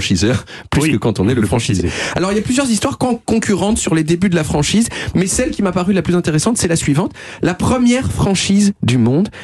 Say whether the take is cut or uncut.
uncut